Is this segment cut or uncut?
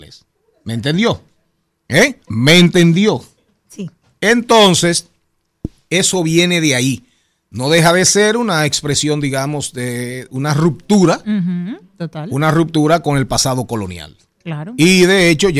cut